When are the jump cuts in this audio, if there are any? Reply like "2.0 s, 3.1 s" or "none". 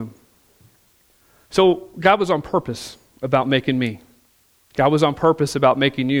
none